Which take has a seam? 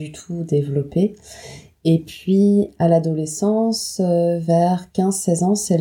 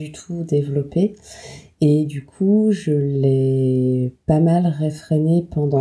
first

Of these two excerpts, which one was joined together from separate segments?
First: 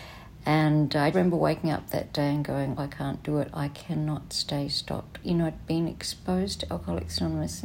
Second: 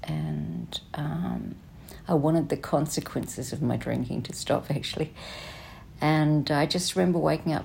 first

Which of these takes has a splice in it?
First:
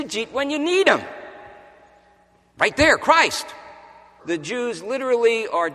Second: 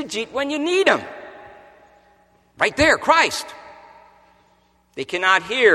first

